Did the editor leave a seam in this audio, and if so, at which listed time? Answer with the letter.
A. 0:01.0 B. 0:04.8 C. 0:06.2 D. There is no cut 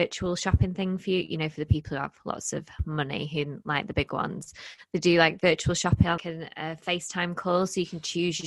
C